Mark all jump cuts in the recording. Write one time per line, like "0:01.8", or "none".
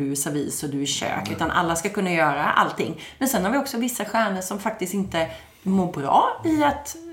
none